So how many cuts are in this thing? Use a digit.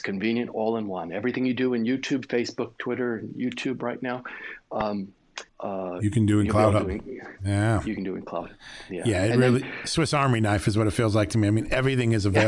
1